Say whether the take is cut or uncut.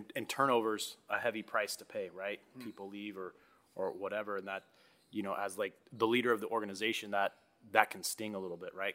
uncut